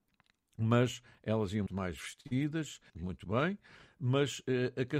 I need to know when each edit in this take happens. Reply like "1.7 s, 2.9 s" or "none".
1.7 s, 2.9 s